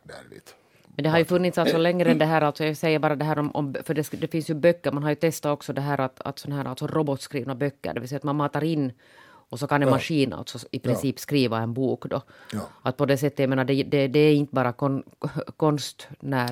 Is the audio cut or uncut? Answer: uncut